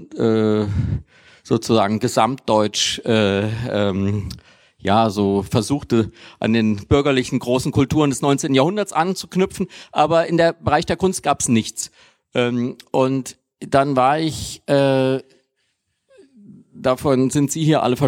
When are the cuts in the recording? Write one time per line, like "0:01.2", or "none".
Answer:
none

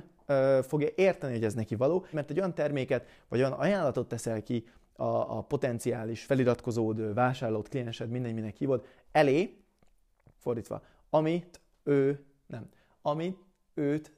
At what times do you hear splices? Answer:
0:02.1
0:10.3

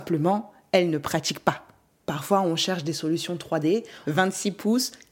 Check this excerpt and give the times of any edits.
0:01.9
0:04.0

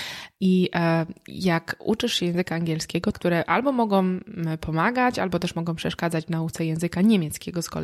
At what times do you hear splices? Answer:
0:03.1

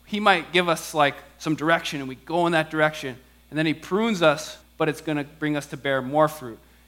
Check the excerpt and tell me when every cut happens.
0:04.6

